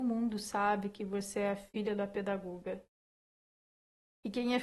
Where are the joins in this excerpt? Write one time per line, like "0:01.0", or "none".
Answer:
none